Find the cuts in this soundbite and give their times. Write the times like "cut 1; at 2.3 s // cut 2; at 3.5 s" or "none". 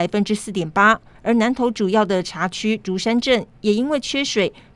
cut 1; at 1.1 s